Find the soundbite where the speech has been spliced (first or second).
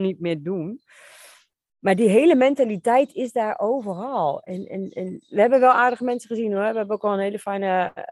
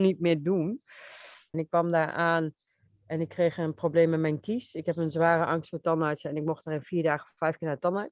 second